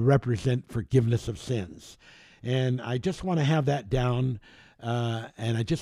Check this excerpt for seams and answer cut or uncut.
uncut